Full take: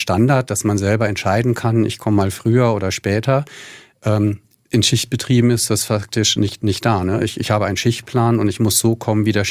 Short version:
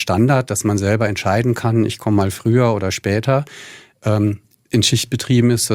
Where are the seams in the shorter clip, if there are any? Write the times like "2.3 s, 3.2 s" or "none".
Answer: none

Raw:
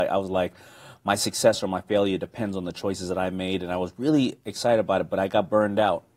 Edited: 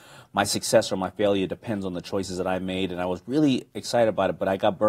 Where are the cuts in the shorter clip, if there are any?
none

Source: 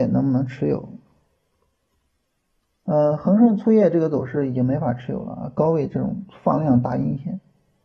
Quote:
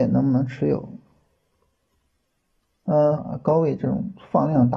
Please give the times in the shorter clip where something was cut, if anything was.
3.2 s

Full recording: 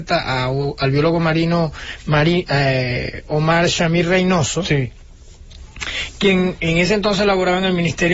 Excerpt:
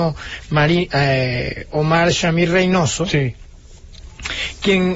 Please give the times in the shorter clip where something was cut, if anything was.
none

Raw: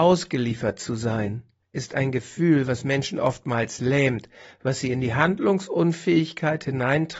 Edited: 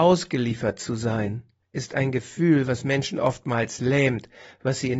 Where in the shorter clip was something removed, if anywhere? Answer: none

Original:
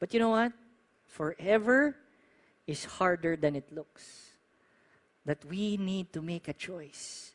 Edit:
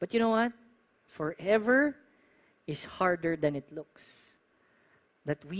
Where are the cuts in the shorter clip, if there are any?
none

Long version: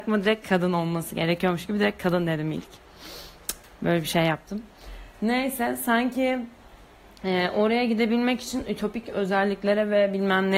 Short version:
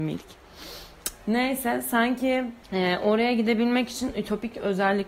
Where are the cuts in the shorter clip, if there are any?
1.2 s, 2.6 s

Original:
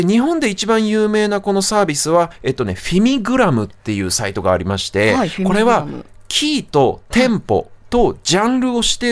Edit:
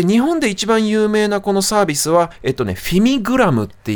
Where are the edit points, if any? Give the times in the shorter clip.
none

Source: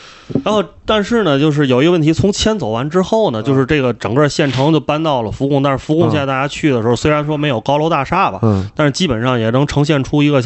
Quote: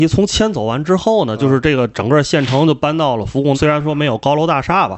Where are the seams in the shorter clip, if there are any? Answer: 3.5 s

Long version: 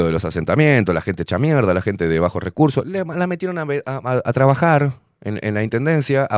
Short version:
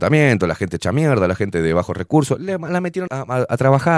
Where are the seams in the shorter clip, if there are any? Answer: 3.1 s

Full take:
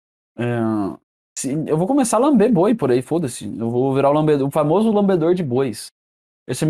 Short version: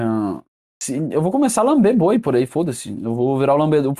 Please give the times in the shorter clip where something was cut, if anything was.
none

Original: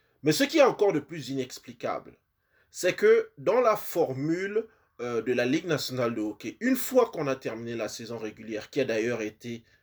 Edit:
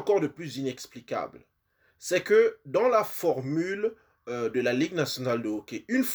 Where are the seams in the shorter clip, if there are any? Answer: none

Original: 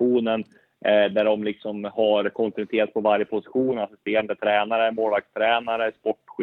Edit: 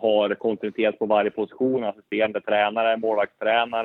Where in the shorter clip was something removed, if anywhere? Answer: none

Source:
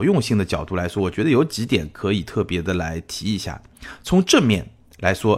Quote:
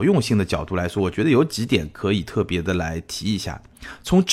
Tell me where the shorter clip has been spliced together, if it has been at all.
none

